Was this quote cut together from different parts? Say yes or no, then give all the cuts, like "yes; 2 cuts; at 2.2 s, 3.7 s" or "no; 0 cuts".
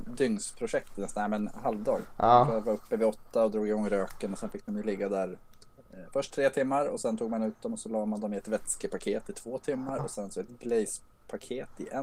no; 0 cuts